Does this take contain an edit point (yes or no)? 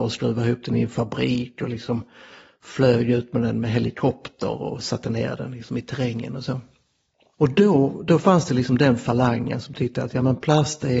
no